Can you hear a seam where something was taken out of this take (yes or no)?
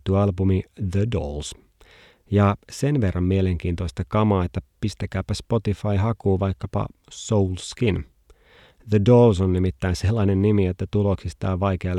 no